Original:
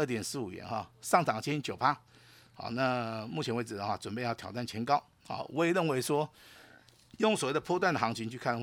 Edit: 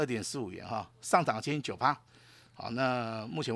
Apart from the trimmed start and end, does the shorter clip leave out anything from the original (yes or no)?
no